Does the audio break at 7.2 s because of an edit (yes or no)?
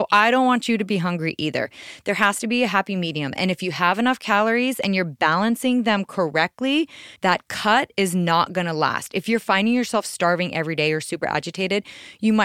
yes